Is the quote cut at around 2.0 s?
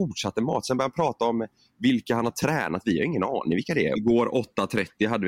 no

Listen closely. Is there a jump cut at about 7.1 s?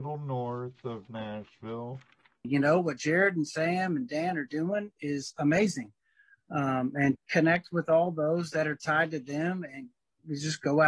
yes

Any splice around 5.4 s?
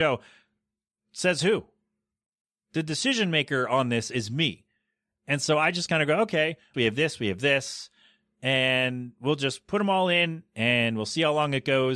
no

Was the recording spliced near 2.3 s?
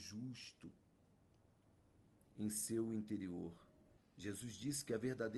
no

